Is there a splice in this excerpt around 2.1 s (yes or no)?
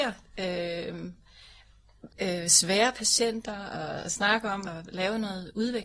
yes